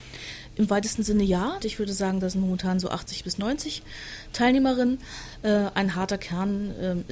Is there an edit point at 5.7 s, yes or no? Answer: no